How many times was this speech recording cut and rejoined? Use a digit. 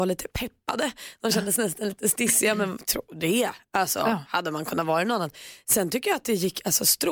0